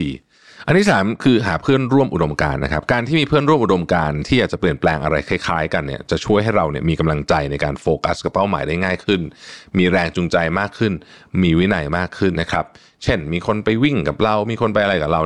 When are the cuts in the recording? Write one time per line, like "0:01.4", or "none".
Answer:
0:12.3